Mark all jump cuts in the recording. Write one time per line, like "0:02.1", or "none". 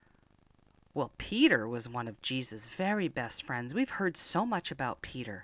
none